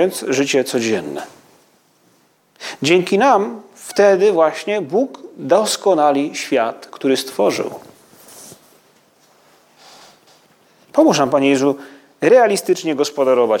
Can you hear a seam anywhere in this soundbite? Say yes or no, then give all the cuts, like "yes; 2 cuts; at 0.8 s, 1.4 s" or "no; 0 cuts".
no; 0 cuts